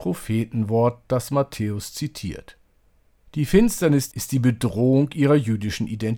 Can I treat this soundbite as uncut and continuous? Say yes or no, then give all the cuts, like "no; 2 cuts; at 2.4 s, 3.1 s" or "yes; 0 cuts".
no; 1 cut; at 4.1 s